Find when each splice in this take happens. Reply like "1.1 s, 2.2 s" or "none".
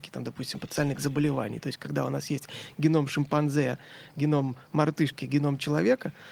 none